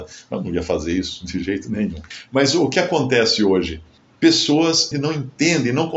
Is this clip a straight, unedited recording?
no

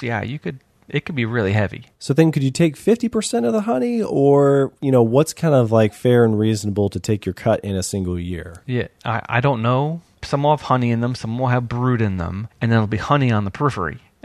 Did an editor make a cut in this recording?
yes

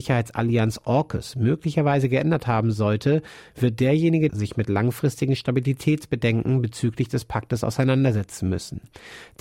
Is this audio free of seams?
no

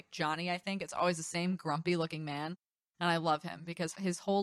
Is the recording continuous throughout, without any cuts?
yes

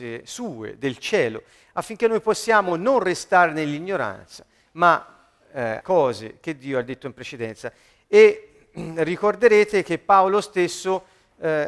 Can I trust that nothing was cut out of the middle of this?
no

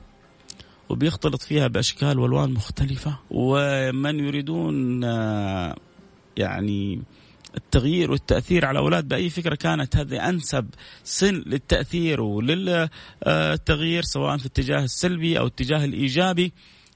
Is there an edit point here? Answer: yes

